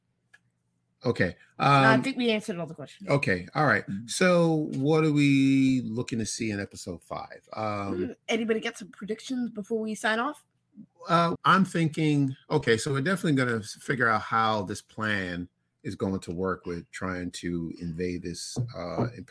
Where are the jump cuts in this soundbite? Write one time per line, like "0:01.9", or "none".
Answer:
0:11.4